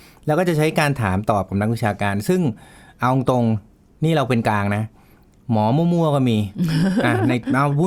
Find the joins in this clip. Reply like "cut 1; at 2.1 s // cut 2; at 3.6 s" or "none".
none